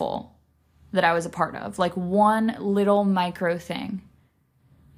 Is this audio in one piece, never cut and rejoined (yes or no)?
yes